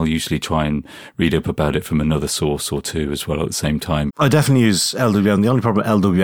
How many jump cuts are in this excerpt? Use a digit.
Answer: 1